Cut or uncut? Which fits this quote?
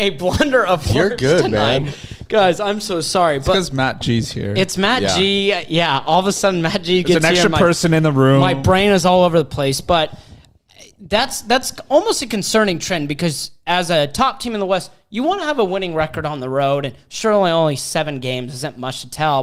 uncut